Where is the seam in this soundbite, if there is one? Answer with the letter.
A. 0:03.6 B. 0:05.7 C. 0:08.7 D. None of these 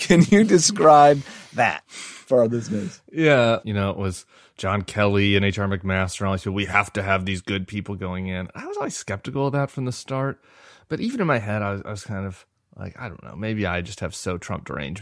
A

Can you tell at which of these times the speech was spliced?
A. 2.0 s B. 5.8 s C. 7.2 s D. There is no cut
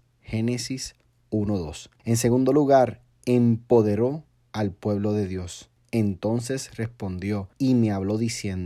A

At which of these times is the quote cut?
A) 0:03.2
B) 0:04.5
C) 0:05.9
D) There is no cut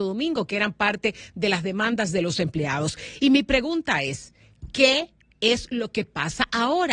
D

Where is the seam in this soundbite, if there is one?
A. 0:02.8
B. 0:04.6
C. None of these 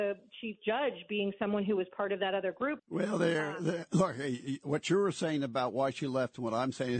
A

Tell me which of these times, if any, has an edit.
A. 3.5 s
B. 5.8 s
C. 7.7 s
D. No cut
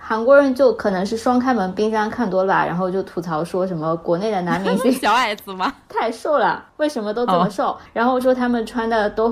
D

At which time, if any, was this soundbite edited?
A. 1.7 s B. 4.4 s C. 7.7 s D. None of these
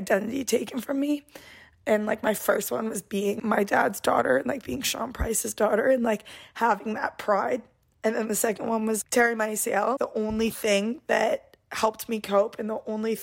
D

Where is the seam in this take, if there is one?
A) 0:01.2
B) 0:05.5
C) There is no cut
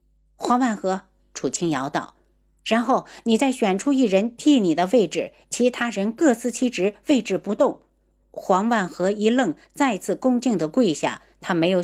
A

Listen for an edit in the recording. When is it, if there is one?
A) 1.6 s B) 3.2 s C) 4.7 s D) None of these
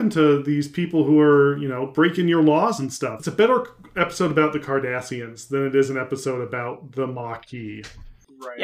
B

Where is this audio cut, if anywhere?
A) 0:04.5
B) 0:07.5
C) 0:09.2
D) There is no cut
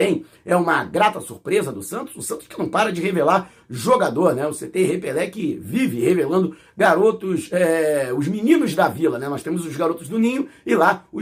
D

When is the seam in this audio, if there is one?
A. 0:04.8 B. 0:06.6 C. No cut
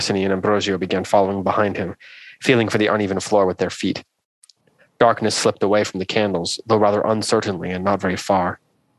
A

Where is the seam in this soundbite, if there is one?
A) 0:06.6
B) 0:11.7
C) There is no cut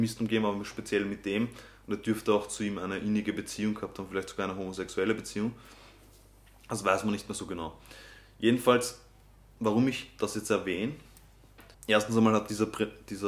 B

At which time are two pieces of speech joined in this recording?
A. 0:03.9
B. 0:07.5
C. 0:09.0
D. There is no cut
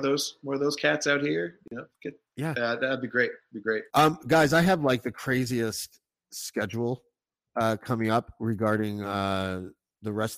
A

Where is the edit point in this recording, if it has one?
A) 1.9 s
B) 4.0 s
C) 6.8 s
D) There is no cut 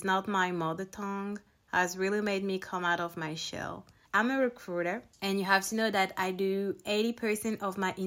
B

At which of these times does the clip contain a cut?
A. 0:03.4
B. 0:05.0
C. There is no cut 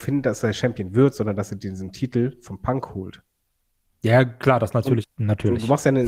B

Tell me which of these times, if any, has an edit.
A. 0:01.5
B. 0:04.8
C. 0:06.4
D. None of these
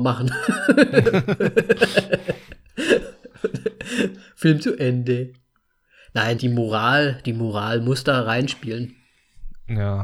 C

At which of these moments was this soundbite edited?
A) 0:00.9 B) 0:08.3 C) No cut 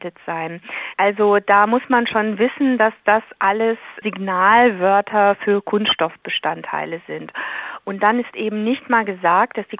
A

